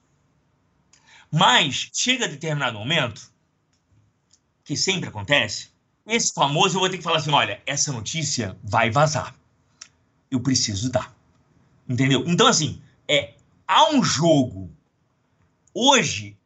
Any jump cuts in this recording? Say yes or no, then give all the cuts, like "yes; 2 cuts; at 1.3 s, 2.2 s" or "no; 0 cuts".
yes; 1 cut; at 6.0 s